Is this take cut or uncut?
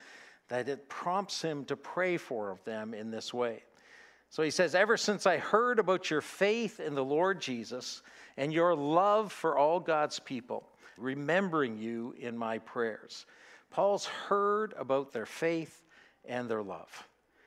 cut